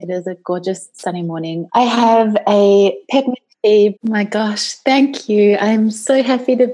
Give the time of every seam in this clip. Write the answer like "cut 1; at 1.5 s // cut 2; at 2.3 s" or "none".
cut 1; at 1.7 s // cut 2; at 4.0 s